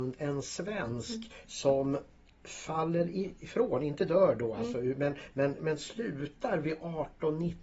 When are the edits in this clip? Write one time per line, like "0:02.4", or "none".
0:05.6